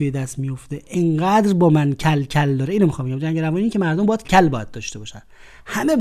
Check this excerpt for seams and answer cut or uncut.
cut